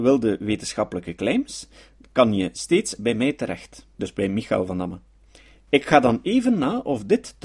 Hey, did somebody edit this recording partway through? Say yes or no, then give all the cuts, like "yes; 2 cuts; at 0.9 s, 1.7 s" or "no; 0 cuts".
yes; 1 cut; at 3.9 s